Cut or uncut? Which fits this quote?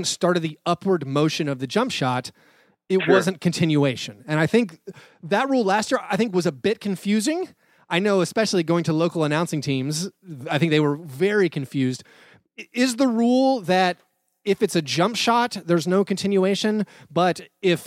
uncut